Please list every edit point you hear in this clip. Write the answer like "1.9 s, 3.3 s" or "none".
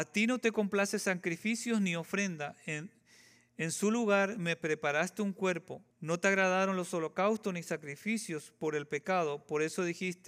5.9 s